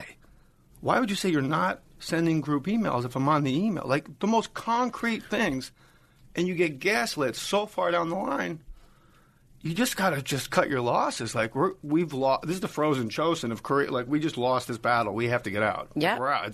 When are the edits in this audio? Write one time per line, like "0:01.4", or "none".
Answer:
none

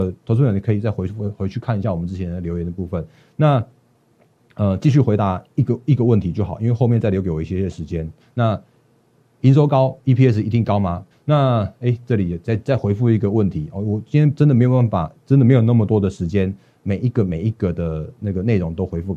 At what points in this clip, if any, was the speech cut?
0:08.2
0:11.1

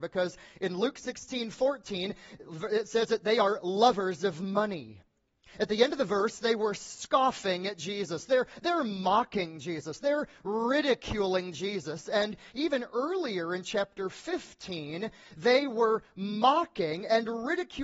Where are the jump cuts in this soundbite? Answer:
none

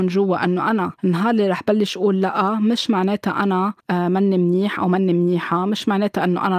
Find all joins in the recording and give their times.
0:01.0
0:03.8

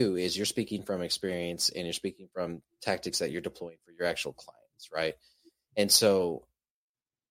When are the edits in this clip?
none

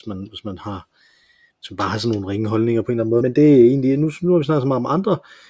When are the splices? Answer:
0:03.2

